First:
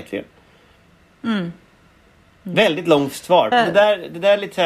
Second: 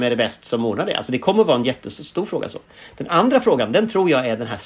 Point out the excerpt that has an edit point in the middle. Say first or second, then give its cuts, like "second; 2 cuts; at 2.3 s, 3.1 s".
first; 1 cut; at 3.5 s